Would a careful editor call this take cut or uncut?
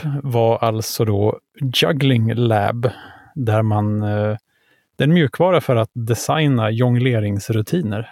uncut